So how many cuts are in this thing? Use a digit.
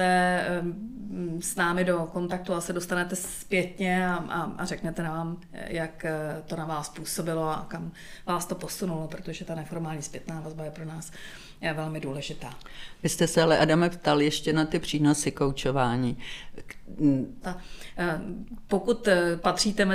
1